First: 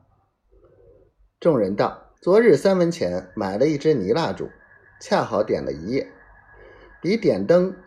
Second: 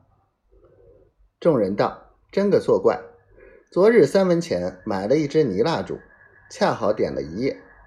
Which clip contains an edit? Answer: first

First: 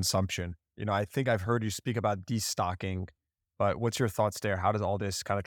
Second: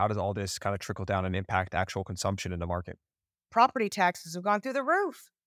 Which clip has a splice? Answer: second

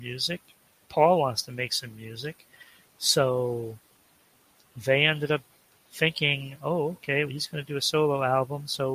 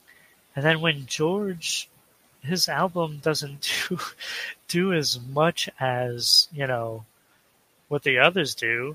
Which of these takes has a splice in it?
first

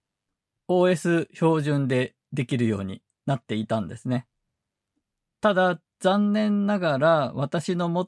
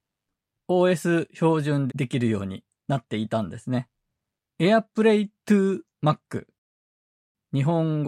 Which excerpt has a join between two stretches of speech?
second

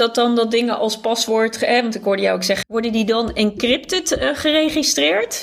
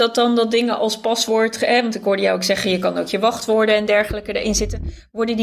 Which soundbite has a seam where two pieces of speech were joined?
first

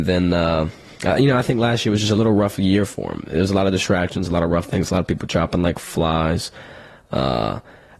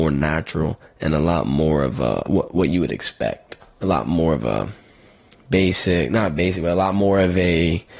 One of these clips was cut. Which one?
second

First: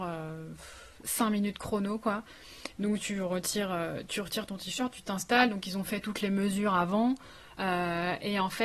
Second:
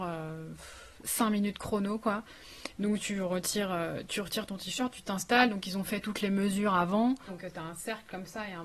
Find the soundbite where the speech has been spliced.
second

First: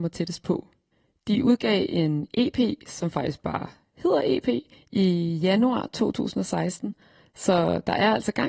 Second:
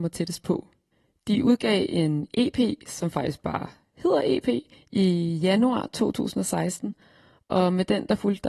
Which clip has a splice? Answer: first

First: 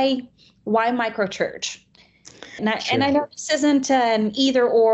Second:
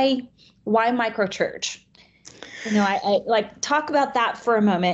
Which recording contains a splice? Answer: first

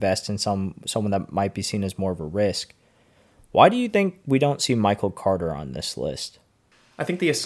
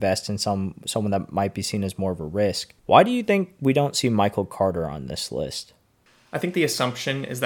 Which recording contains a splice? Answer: second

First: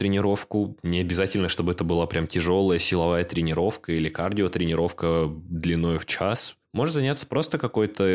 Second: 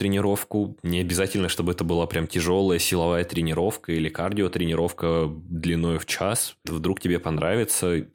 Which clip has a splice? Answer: second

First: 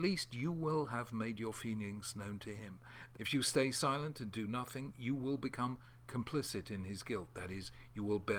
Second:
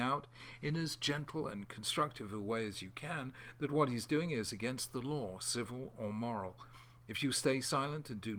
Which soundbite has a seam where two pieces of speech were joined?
first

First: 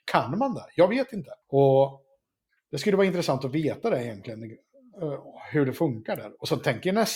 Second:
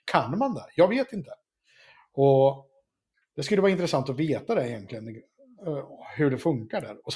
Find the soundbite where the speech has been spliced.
first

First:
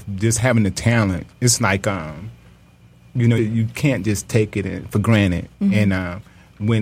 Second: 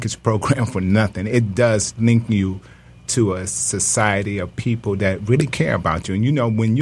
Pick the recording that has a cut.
first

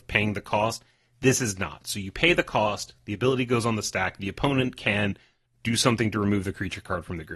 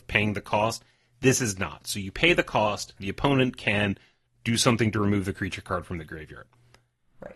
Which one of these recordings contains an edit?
second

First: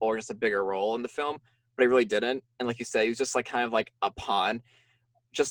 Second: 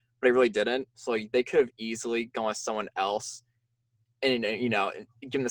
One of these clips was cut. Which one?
second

